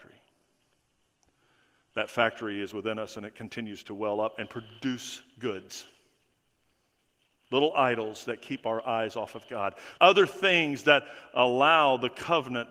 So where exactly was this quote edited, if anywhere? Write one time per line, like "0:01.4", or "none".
0:10.0

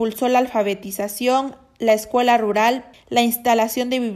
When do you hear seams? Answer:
0:02.9

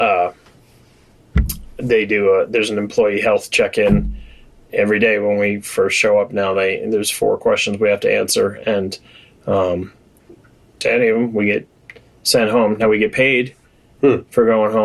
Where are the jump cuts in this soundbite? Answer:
0:10.7

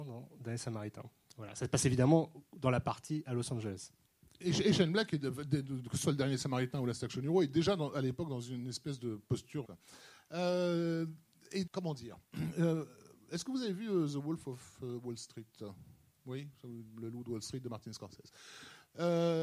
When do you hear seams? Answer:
0:09.6
0:11.7

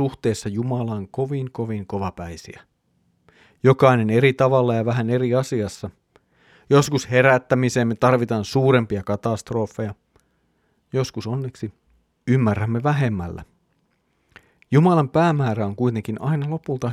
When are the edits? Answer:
none

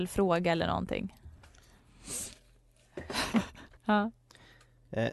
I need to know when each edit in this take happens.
0:03.8

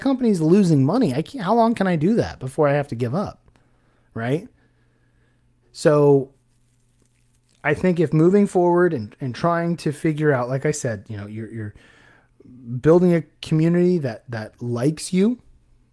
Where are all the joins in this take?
0:05.6

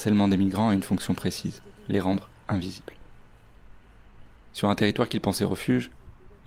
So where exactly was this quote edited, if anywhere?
0:01.8

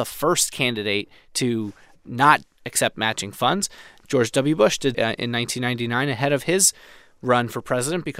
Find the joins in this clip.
0:04.9

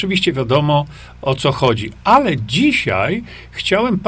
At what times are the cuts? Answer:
none

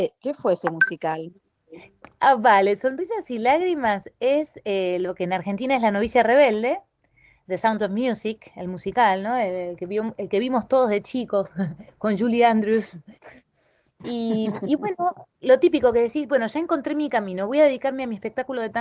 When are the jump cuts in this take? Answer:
none

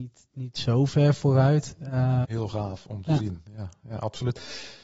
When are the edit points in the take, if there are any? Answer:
0:02.2

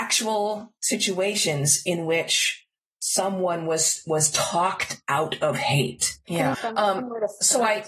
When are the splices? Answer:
0:06.5

